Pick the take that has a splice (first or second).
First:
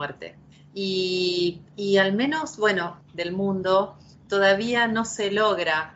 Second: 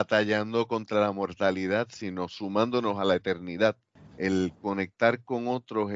first